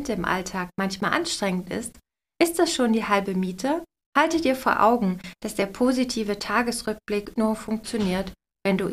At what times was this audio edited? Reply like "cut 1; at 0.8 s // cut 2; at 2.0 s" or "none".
cut 1; at 4.0 s // cut 2; at 7.4 s